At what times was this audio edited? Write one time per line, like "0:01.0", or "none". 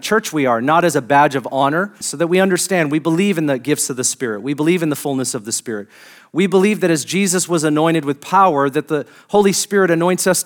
0:02.0